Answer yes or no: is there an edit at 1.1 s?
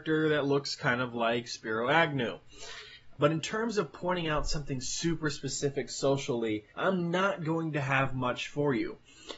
no